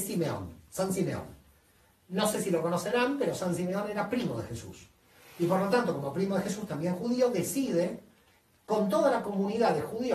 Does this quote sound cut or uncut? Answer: uncut